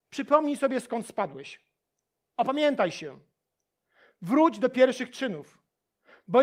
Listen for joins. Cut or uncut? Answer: uncut